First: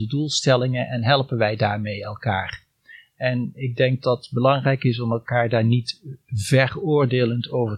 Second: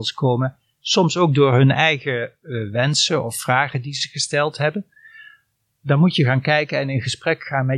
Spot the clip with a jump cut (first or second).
first